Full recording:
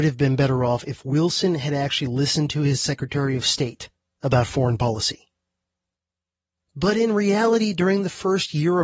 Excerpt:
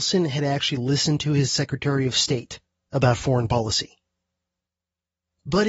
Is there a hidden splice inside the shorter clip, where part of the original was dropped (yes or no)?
no